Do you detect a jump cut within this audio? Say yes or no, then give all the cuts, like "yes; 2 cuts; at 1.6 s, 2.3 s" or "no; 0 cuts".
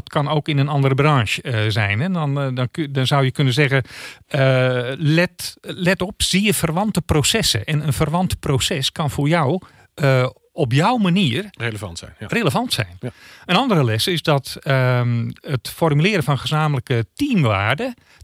no; 0 cuts